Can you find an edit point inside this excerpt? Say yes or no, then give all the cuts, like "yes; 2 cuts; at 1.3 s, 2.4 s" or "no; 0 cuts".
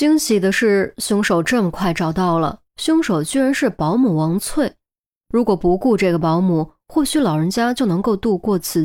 yes; 1 cut; at 2.7 s